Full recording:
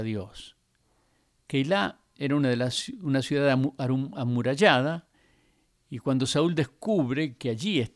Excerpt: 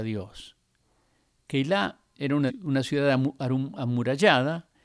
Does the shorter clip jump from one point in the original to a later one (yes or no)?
yes